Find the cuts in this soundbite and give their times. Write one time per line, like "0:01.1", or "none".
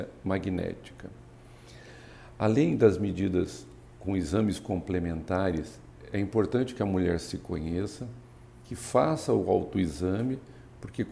none